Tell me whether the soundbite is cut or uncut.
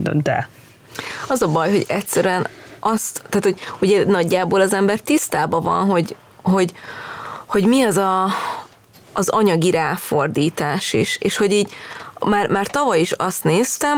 uncut